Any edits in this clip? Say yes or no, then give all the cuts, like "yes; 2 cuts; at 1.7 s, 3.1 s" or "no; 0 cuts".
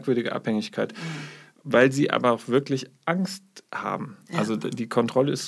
no; 0 cuts